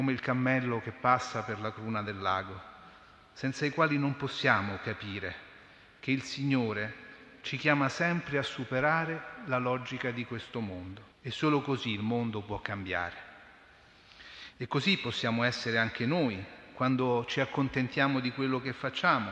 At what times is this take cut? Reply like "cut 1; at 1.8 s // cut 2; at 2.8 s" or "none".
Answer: cut 1; at 11.1 s // cut 2; at 14.5 s